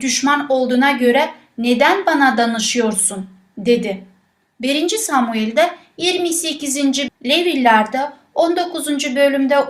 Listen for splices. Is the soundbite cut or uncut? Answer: cut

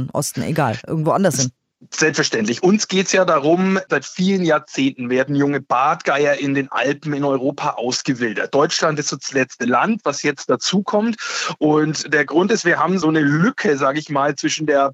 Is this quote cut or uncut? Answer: uncut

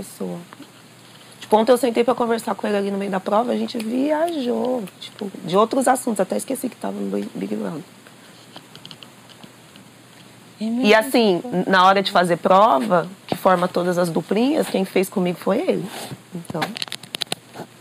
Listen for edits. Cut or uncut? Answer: uncut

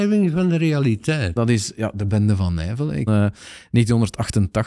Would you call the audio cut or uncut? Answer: cut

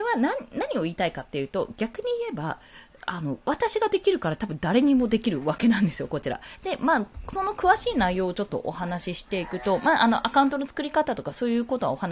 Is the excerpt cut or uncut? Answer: uncut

